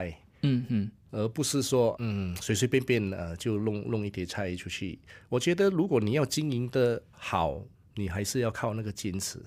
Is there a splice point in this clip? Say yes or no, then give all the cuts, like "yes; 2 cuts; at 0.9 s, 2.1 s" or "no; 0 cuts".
no; 0 cuts